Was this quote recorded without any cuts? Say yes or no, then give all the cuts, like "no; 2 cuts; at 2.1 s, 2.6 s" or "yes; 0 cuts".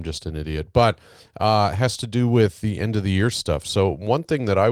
yes; 0 cuts